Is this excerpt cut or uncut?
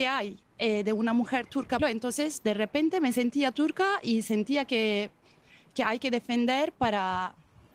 cut